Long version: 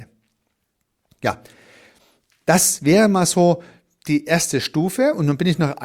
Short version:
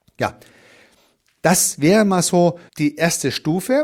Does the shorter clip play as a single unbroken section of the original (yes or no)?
no